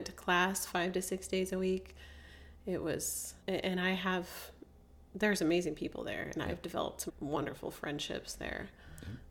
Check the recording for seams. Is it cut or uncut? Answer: cut